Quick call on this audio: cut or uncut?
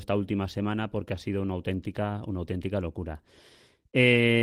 uncut